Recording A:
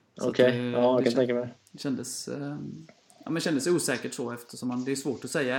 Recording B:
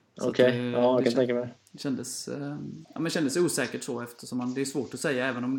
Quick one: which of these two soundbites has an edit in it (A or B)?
B